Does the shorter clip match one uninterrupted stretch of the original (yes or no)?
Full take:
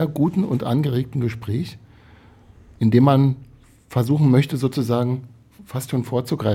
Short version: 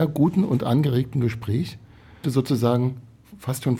no